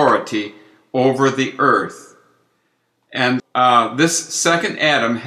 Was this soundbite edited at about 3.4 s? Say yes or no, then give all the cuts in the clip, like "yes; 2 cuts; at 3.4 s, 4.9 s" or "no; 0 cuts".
yes; 1 cut; at 3.4 s